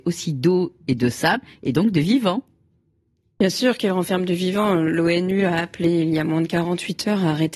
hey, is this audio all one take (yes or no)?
yes